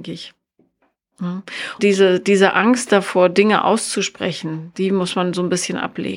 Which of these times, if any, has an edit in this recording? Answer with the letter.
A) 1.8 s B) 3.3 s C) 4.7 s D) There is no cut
A